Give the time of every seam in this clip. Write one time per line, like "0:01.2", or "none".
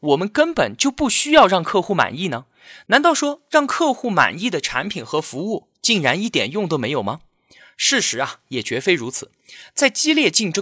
none